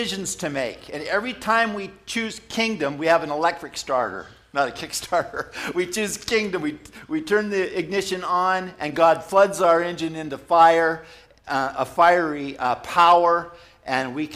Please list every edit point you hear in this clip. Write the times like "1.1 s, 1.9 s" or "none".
none